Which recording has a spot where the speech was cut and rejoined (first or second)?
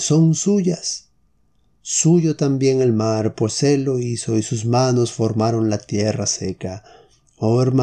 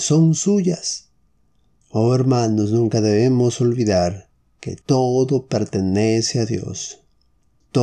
second